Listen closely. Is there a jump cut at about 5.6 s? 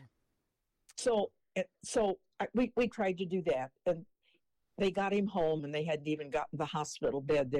yes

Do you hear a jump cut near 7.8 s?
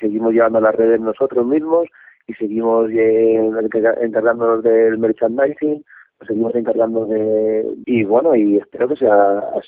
yes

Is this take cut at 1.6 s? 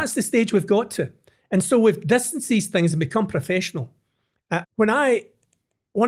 no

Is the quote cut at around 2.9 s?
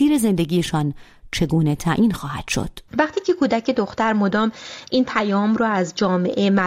yes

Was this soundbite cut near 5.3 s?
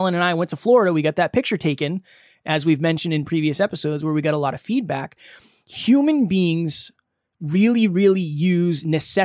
no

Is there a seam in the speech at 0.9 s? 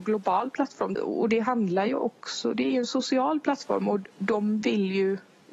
yes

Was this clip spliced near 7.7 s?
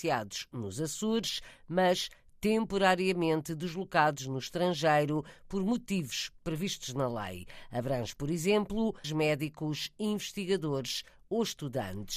no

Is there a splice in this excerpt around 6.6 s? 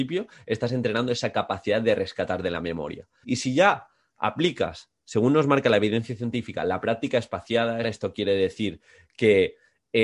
no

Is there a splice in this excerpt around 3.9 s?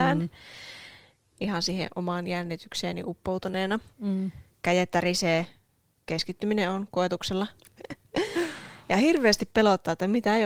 yes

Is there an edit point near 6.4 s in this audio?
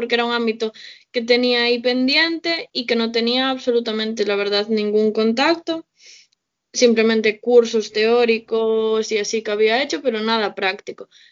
no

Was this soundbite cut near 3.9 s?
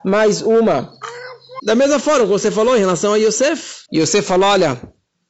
yes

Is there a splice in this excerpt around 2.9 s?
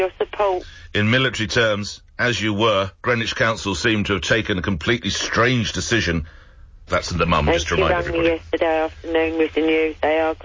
yes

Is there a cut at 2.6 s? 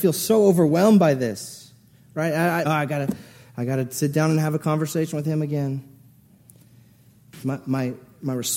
yes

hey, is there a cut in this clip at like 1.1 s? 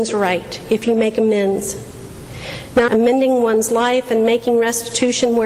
no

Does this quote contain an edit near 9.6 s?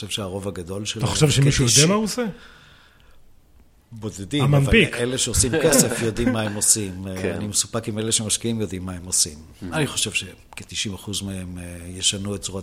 no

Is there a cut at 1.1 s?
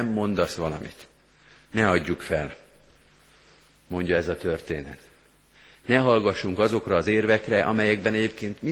no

